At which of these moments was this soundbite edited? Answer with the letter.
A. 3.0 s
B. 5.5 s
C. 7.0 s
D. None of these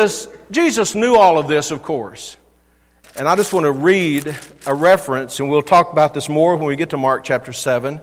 A